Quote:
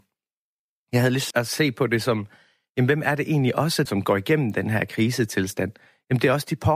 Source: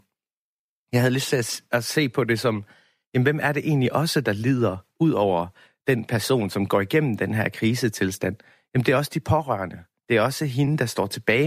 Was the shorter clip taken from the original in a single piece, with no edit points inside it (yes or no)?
no